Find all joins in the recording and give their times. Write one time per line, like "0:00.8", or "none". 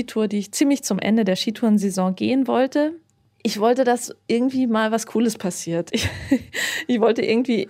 none